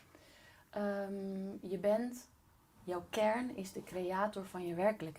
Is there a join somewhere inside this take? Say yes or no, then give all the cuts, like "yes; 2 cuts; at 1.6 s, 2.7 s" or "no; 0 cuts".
no; 0 cuts